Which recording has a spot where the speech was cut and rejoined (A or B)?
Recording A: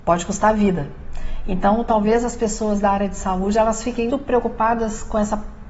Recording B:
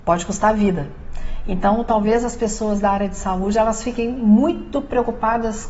A